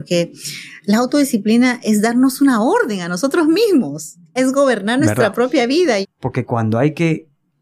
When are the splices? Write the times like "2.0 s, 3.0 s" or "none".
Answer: 4.4 s, 6.0 s

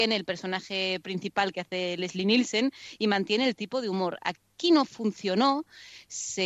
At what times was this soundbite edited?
none

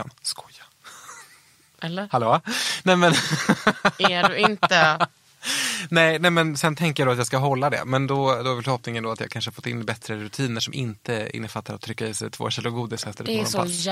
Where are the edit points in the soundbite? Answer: none

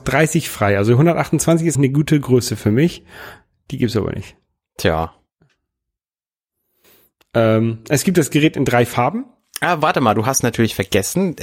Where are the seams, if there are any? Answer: 1.7 s

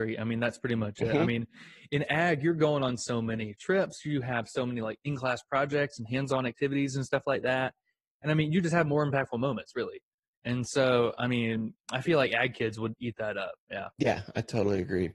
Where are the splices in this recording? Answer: 13.6 s

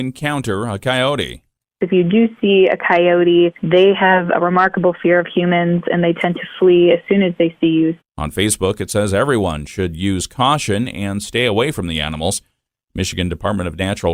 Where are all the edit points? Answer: 8.0 s

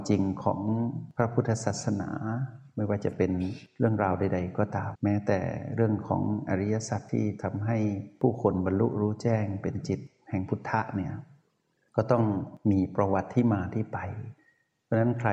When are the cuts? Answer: 4.9 s

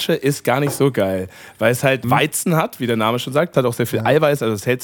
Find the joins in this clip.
2.0 s, 3.5 s

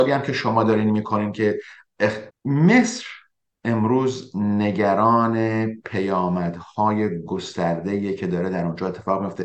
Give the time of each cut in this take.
2.3 s

